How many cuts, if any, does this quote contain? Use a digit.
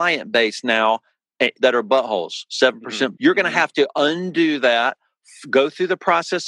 2